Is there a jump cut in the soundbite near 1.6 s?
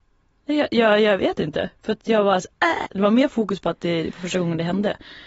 no; 1 cut; at 2.9 s

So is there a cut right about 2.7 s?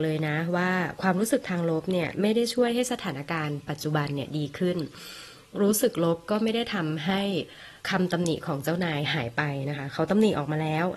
no; 1 cut; at 7.8 s

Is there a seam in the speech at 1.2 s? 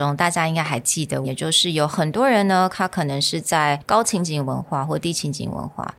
yes; 1 cut; at 1.2 s

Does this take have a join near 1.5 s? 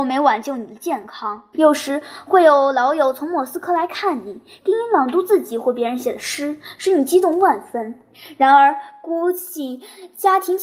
yes; 1 cut; at 1.5 s

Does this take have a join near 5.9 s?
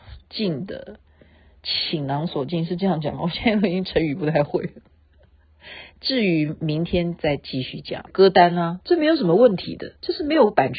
yes; 2 cuts; at 5.9 s, 8.1 s

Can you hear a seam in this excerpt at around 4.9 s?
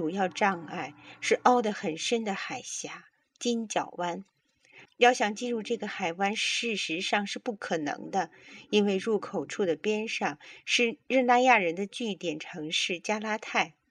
yes; 1 cut; at 4.9 s

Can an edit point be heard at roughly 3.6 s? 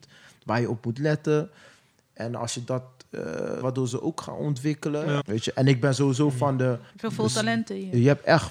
yes; 3 cuts; at 3.6 s, 5.2 s, 6.9 s

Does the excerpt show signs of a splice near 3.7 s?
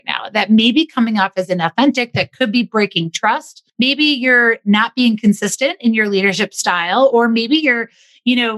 yes; 1 cut; at 3.7 s

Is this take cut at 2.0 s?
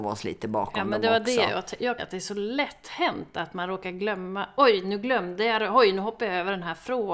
yes; 1 cut; at 2.0 s

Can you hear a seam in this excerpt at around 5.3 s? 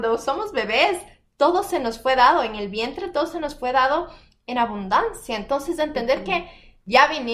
no; 0 cuts

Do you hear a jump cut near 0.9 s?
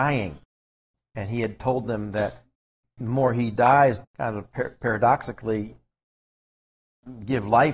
no; 1 cut; at 4.0 s

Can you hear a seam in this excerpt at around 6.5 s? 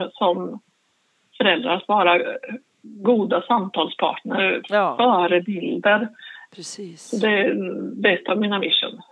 yes; 1 cut; at 6.5 s

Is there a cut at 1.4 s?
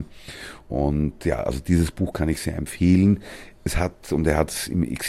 no; 1 cut; at 3.5 s

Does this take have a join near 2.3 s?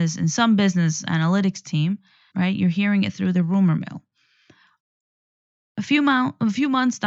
yes; 2 cuts; at 2.3 s, 5.6 s

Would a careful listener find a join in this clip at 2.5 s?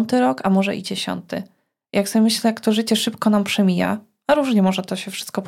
no; 0 cuts

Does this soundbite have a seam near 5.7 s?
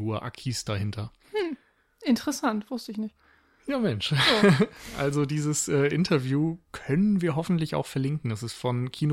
no; 0 cuts

